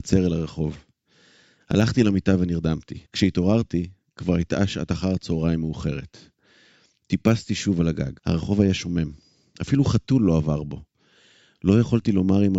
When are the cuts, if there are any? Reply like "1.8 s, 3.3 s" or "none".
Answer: 1.6 s, 3.1 s, 8.2 s